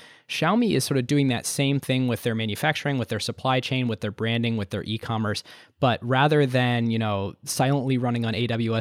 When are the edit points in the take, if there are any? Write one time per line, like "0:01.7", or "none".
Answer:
none

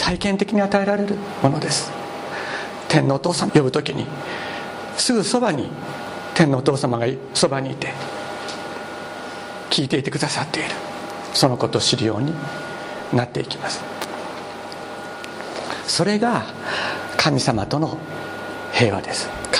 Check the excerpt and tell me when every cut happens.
0:03.5

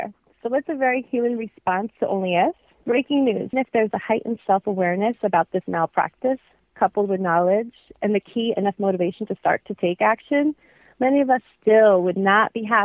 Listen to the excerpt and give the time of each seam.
0:03.5

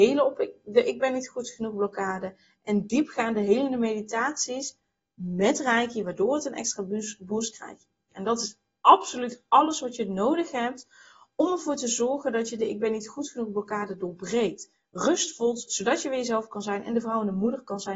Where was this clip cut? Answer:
0:08.1

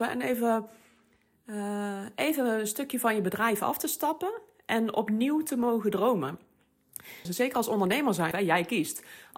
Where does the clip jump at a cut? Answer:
0:07.3
0:08.3

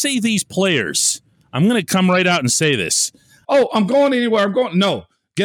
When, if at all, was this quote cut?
0:03.4

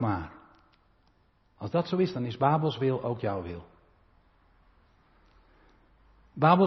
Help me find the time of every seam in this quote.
0:01.5

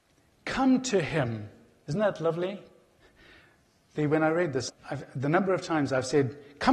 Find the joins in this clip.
0:04.7

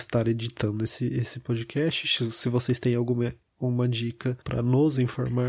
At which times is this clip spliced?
0:04.4

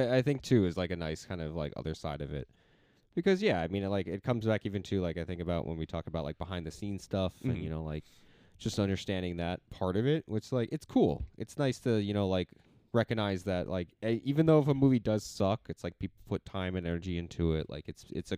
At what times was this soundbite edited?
none

